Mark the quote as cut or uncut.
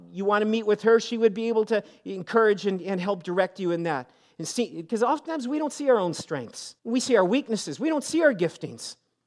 cut